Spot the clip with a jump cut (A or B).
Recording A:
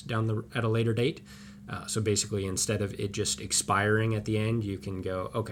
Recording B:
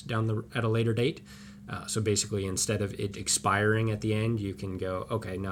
B